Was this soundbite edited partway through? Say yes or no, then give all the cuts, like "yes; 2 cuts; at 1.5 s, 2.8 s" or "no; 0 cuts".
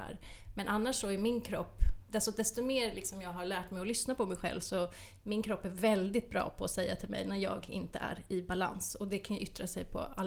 yes; 1 cut; at 2.1 s